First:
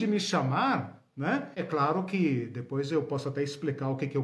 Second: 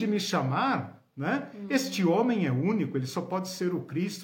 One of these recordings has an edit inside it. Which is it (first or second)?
first